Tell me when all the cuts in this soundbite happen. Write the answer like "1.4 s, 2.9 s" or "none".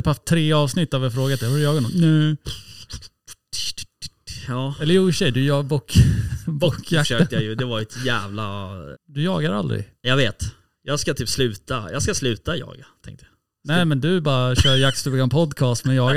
8.9 s